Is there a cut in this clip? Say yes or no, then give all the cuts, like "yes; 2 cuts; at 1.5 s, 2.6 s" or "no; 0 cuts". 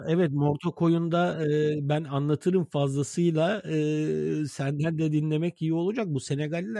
no; 0 cuts